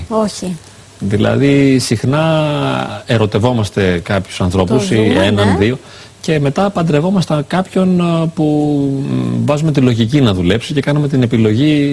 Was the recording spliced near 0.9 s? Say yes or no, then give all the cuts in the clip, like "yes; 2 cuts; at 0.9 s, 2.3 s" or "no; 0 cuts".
no; 0 cuts